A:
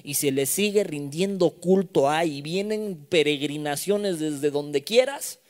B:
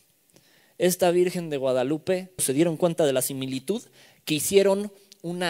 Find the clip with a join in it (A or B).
B